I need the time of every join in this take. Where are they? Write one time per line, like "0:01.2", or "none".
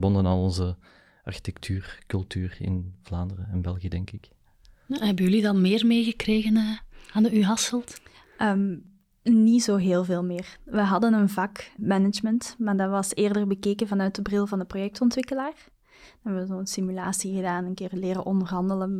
0:11.8

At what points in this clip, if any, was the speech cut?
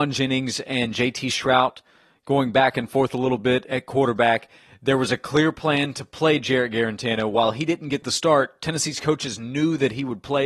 none

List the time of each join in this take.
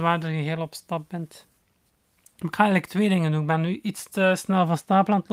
none

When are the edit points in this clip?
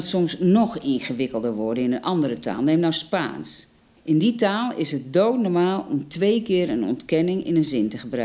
none

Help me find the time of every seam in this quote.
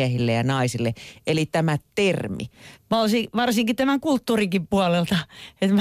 0:02.7

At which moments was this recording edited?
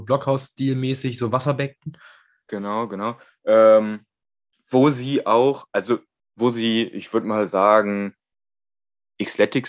none

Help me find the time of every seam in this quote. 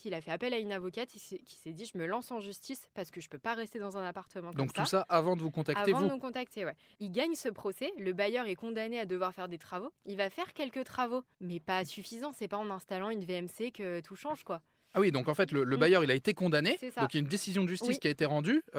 none

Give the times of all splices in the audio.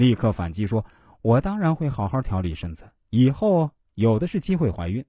none

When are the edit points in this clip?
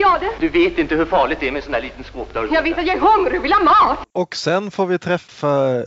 0:04.0

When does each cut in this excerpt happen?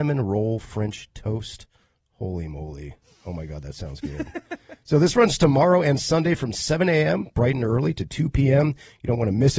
none

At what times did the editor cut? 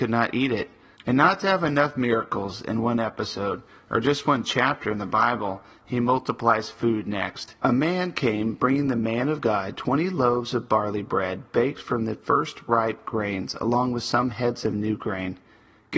0:00.9
0:07.6

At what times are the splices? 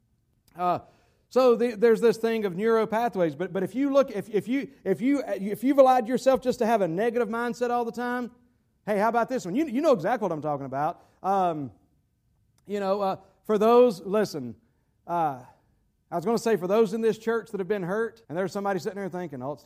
0:18.2

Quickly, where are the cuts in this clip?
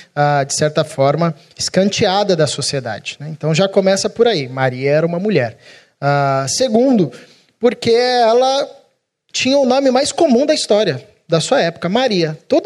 none

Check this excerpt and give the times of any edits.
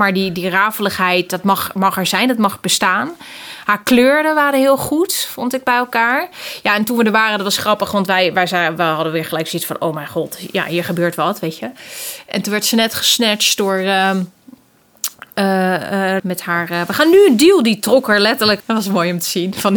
0:16.2
0:18.6

